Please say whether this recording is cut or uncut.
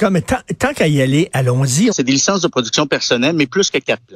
cut